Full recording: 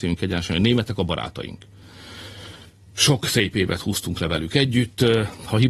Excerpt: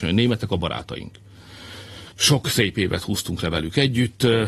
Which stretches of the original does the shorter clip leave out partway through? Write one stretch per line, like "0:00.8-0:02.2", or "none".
0:02.6-0:02.9